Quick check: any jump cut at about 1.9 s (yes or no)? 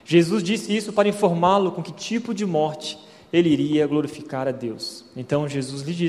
no